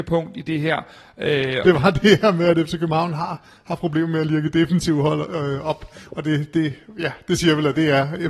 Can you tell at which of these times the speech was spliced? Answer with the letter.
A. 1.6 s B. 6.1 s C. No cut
A